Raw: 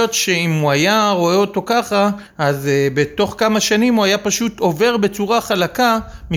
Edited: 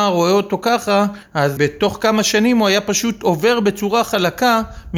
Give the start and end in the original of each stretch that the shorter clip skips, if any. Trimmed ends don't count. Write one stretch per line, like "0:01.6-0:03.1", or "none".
0:02.6-0:02.9